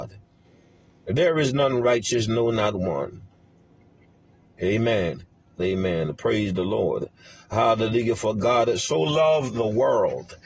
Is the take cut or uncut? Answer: cut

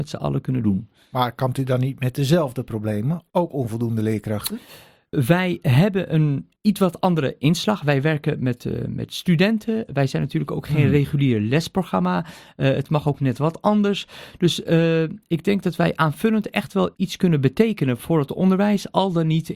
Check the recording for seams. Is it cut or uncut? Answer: cut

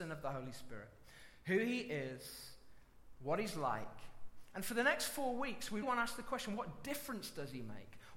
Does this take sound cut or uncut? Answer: cut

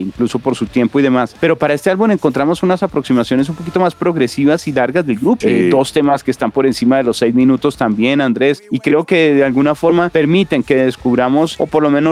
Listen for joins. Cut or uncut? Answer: cut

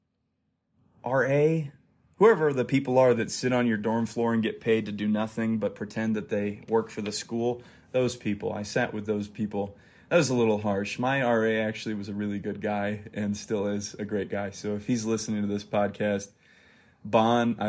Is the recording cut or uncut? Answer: uncut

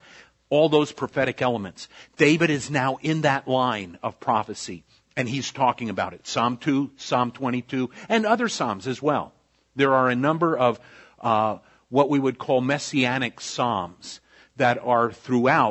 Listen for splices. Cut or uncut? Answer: uncut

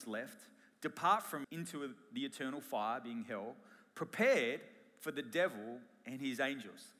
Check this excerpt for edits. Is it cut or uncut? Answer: cut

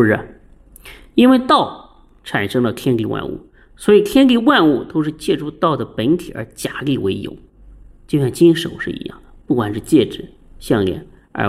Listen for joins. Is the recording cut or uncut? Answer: uncut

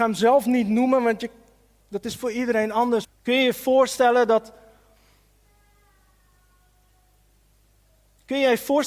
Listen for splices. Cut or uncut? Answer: cut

